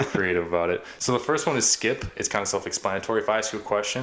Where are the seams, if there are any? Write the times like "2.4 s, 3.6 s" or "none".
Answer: none